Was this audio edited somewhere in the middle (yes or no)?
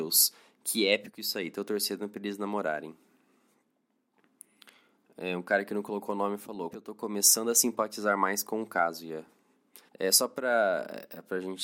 yes